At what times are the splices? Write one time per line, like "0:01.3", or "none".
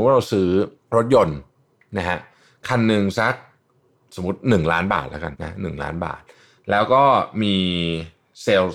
0:05.3